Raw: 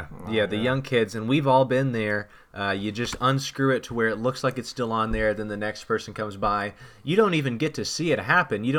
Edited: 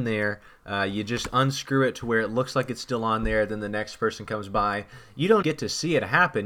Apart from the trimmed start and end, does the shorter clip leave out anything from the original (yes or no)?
yes